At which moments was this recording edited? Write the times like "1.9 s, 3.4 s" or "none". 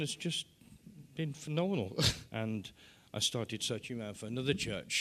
2.3 s

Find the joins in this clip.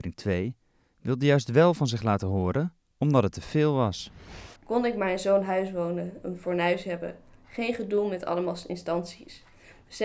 4.6 s

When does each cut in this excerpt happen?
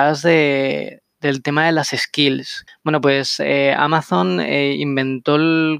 2.7 s

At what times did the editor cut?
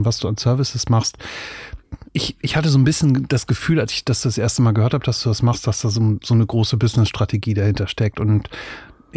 2.1 s

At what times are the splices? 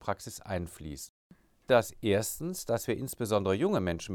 1.6 s

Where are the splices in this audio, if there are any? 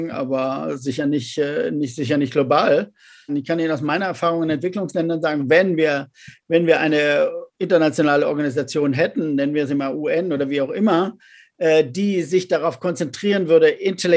3.3 s

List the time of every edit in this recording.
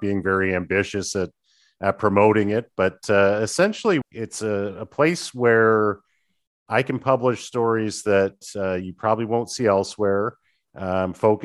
4.0 s

